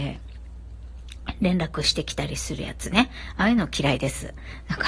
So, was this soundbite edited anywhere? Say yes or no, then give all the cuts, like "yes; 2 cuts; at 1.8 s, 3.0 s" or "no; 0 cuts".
no; 0 cuts